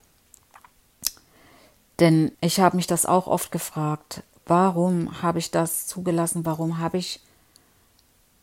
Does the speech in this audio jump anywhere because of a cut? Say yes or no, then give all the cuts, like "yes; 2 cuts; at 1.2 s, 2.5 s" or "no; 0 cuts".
yes; 1 cut; at 2.3 s